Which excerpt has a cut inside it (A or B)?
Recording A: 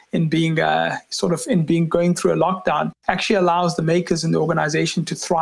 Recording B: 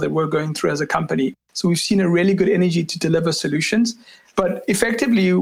B